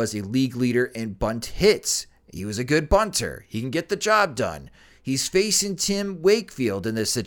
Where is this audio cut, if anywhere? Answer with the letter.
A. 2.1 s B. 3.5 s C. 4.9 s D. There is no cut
D